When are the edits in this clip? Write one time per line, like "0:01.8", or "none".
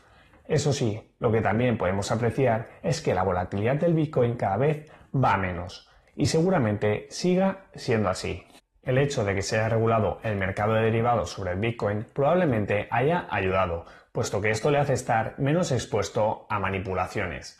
none